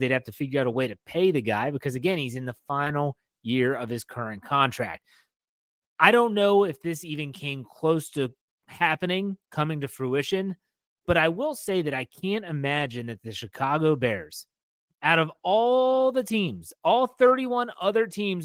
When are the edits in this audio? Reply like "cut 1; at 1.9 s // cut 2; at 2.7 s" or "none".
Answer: none